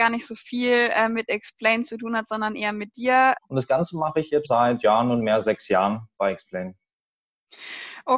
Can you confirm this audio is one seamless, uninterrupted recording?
no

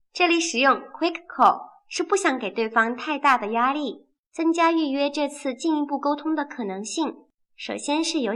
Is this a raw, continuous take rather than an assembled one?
no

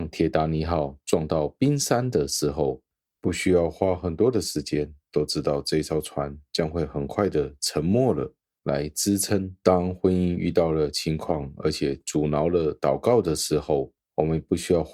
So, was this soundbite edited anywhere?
yes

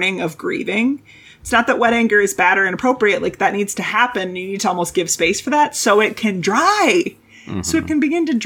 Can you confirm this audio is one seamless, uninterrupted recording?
yes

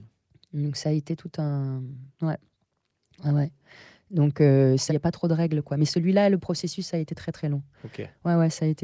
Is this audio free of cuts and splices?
no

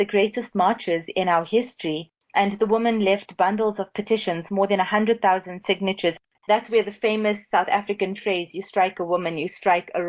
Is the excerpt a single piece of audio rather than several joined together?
yes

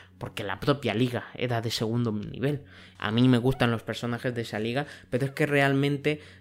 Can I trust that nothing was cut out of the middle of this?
no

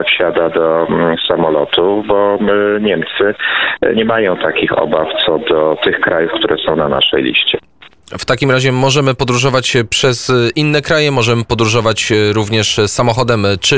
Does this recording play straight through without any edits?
yes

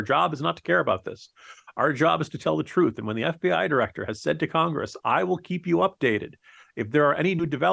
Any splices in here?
no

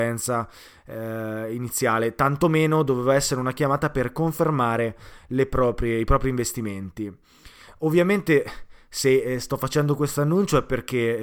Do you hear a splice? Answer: no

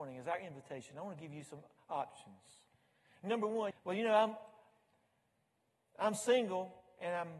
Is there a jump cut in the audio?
yes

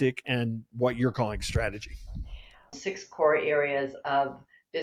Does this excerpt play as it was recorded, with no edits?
no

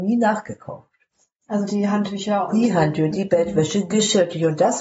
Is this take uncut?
yes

